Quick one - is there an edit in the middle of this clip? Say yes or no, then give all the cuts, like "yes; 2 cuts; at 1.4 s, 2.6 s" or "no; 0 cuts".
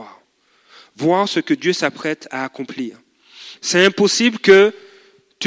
yes; 1 cut; at 3.6 s